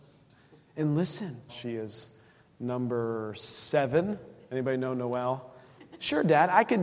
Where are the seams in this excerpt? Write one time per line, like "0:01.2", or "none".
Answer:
0:01.5
0:05.8

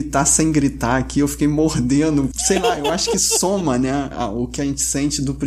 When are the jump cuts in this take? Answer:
0:02.3

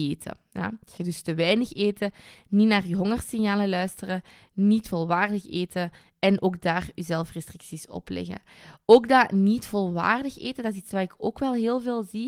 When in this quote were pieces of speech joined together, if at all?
0:01.0

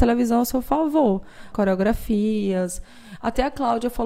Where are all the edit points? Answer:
0:01.5

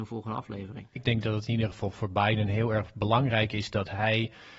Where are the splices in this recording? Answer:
0:01.0

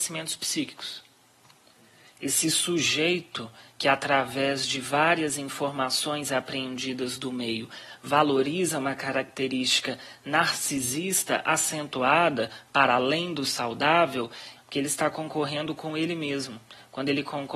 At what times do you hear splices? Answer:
0:14.6

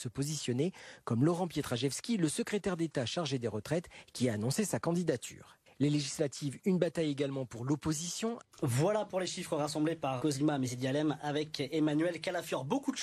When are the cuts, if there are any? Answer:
0:08.4
0:10.2

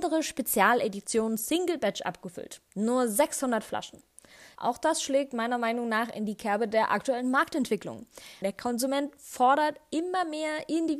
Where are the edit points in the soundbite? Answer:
0:04.6
0:08.4

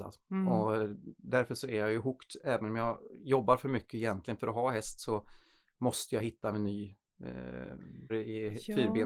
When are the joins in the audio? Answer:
0:08.1

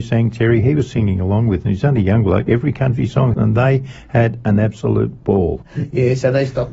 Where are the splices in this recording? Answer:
0:03.3
0:05.6

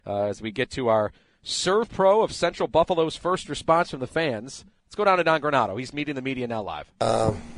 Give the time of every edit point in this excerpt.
0:04.8

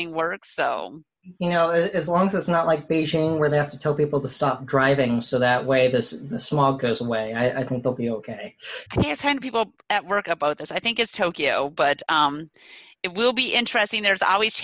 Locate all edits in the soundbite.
0:08.9

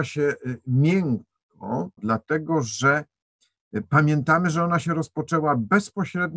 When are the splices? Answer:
0:02.0

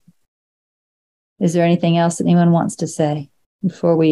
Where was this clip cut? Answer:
0:01.2

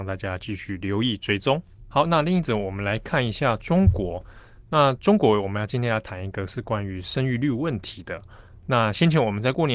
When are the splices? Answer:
none

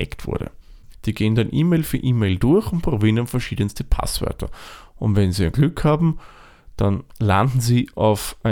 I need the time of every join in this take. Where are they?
0:00.9

